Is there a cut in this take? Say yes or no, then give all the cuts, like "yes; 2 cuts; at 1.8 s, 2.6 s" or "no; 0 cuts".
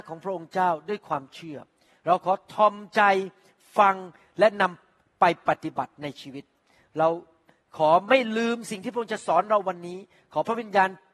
no; 0 cuts